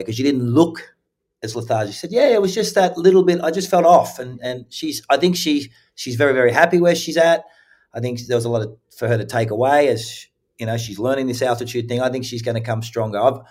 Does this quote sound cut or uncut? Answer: uncut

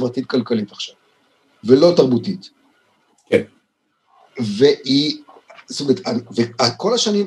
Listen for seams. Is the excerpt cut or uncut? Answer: uncut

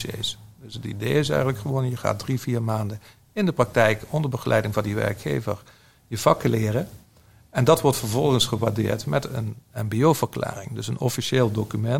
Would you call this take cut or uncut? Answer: uncut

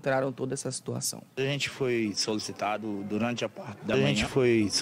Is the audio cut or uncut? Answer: cut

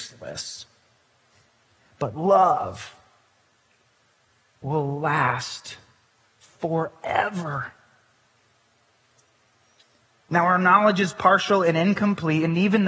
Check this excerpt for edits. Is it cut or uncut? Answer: uncut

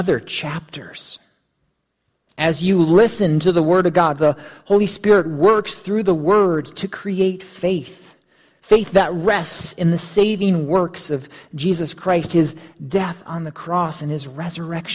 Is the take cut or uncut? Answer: uncut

